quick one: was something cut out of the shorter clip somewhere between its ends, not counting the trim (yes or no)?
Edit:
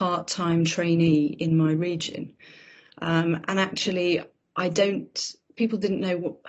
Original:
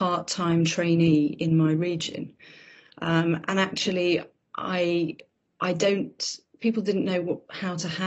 yes